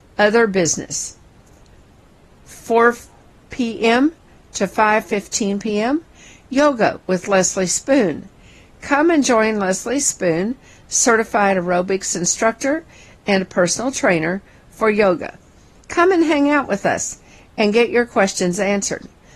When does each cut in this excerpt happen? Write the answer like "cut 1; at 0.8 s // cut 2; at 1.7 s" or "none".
cut 1; at 15.8 s